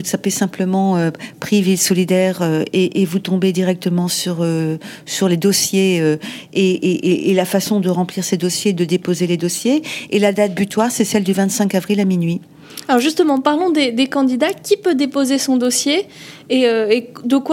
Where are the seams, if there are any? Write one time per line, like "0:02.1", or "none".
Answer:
none